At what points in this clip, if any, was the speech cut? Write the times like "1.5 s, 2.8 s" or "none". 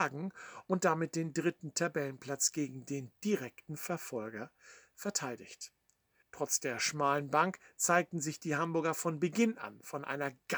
6.2 s